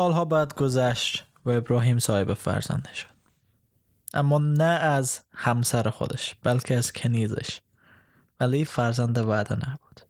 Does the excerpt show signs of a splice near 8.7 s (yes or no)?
yes